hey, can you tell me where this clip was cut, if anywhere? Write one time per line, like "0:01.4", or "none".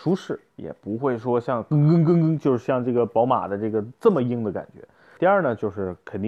0:05.2